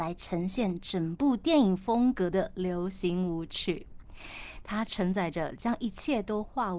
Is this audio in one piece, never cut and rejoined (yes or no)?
yes